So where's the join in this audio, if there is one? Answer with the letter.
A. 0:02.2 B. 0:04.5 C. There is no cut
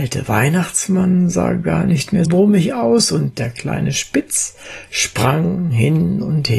A